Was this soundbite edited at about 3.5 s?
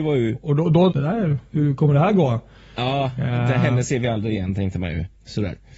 no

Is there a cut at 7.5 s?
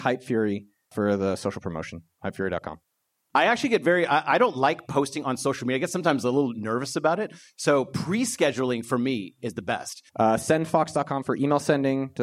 no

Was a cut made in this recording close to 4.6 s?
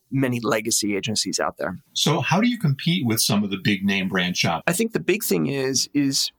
yes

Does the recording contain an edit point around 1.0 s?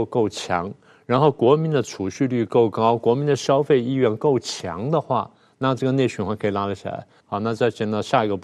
no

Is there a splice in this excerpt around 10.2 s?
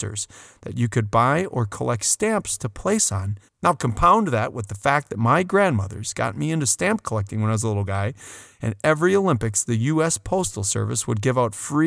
no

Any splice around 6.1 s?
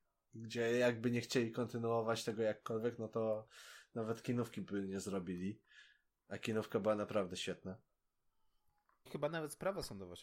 no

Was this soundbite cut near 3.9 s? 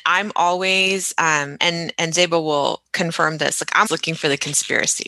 yes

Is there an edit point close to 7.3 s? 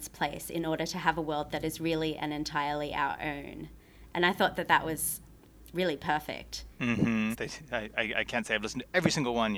yes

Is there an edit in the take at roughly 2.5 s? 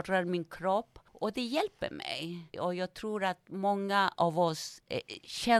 yes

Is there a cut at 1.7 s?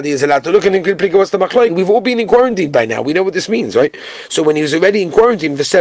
yes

